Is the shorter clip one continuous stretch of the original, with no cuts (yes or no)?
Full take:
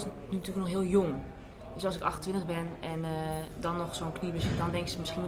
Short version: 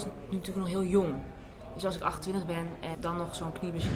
no